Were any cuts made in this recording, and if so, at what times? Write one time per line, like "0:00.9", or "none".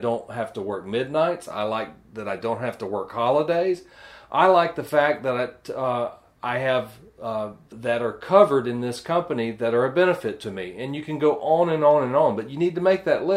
0:07.7